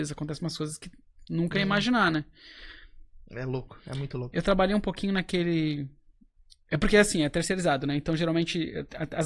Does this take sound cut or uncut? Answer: uncut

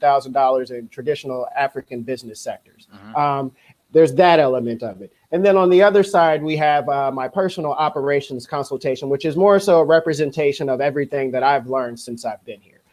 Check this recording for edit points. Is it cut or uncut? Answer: uncut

